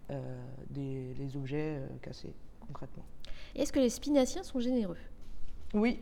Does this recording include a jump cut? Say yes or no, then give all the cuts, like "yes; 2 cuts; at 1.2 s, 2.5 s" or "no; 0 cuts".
no; 0 cuts